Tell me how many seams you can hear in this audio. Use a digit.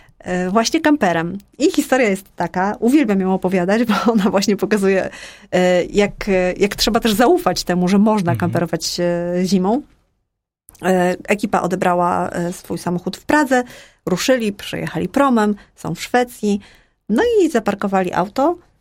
0